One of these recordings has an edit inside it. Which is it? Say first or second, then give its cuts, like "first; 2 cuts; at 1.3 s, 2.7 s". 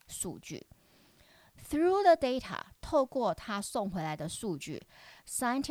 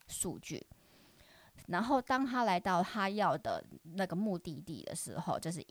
second; 1 cut; at 1.6 s